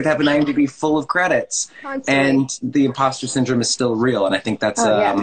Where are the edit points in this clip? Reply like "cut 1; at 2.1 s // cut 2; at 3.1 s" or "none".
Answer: none